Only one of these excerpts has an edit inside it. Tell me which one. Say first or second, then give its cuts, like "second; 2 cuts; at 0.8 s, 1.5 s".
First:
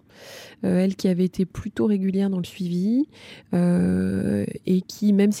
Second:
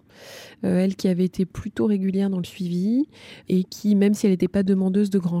second; 1 cut; at 3.4 s